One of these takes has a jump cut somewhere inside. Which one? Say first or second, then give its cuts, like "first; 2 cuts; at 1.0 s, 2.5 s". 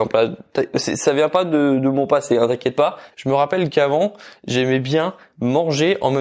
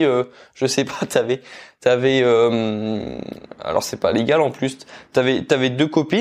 first; 1 cut; at 3.1 s